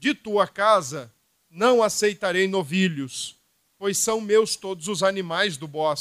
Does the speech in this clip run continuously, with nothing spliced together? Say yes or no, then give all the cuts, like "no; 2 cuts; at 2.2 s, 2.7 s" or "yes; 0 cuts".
no; 1 cut; at 3.7 s